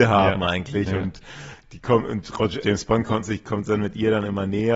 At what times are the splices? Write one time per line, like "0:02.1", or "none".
0:02.6